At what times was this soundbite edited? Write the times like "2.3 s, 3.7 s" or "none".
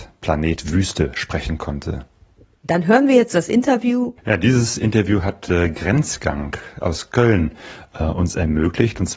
4.2 s